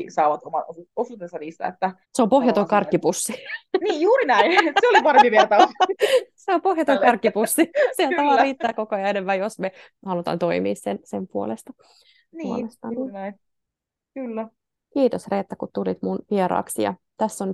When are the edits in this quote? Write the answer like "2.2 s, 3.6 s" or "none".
2.0 s